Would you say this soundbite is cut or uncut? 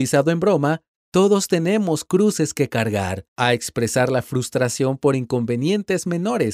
cut